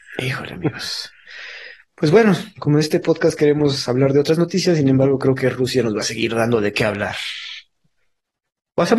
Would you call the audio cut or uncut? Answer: uncut